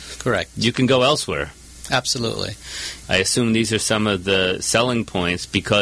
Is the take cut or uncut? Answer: cut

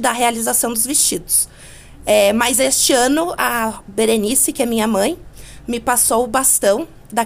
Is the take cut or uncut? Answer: uncut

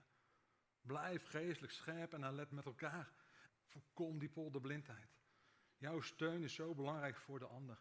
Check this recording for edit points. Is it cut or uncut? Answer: cut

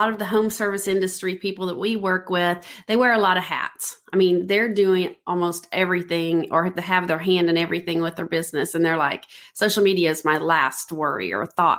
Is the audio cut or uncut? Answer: uncut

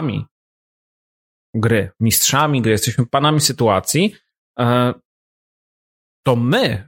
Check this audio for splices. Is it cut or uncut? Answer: uncut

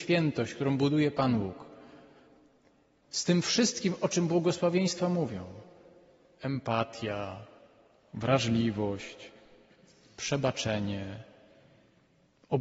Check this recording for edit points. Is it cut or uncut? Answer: cut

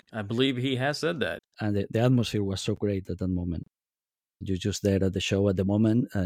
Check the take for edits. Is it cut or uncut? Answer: cut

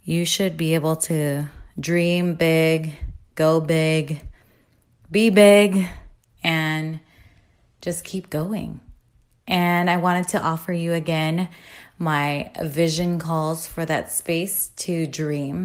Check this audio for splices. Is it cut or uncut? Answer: uncut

